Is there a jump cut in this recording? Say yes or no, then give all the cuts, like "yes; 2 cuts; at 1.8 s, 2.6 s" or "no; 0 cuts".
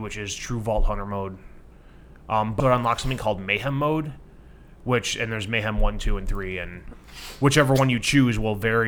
yes; 1 cut; at 2.6 s